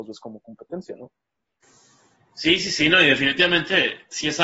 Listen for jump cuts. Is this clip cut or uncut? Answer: uncut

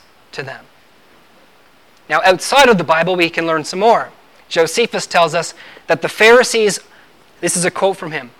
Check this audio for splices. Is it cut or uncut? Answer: uncut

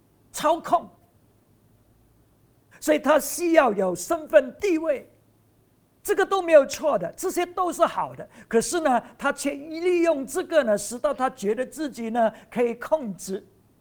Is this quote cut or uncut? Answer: cut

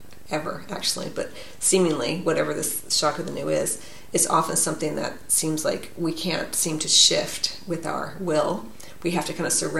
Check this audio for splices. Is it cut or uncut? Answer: uncut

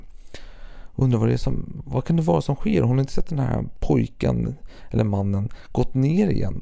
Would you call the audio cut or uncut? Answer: uncut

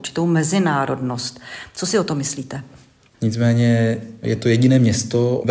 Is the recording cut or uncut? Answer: cut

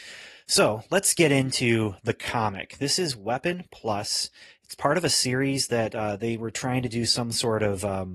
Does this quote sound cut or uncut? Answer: uncut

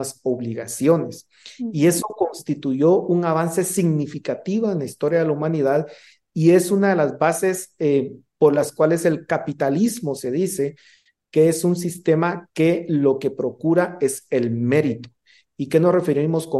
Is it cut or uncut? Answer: uncut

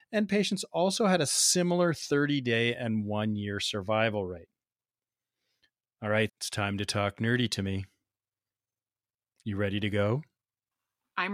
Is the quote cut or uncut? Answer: cut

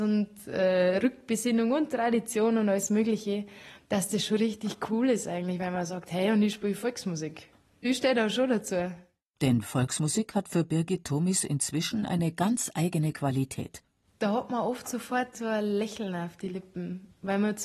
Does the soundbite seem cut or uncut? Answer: uncut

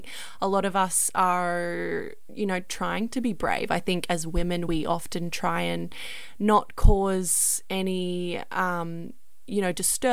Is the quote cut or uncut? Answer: uncut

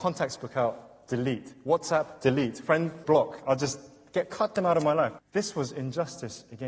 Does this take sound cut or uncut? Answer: cut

